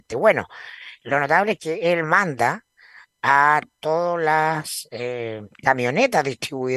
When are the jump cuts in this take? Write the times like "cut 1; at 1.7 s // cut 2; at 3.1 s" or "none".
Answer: none